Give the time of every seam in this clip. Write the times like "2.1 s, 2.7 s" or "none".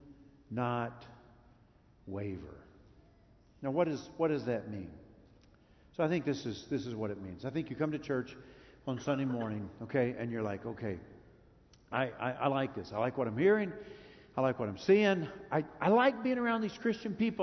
none